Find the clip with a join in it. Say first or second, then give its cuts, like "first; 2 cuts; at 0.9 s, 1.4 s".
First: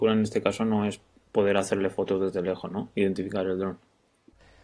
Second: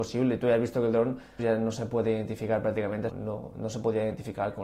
second; 2 cuts; at 1.4 s, 3.1 s